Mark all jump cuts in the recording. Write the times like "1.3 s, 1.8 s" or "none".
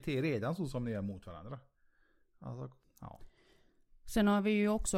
2.8 s

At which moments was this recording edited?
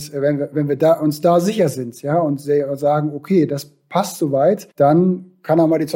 4.7 s

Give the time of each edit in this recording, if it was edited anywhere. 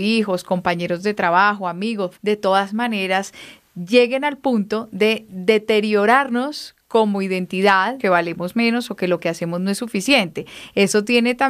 2.1 s, 8.0 s

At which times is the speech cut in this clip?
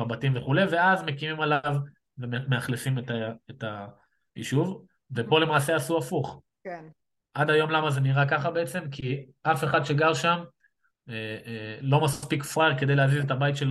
6.5 s

